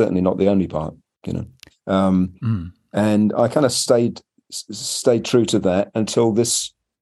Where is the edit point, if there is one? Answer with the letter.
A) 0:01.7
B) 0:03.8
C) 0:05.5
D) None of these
A